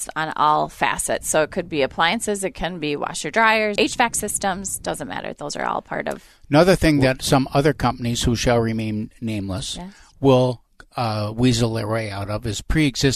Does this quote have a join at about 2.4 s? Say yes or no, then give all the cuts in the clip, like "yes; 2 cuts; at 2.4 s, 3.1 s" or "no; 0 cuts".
no; 1 cut; at 3.8 s